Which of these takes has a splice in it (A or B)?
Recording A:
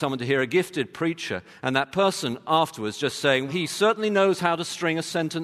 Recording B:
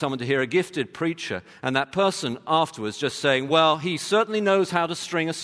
A